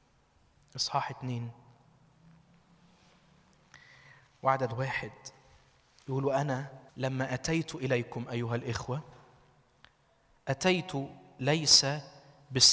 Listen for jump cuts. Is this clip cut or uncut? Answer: cut